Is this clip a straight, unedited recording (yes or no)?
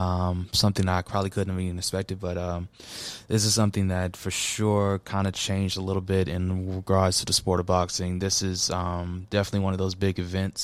yes